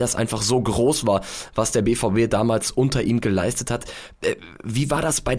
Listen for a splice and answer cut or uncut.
uncut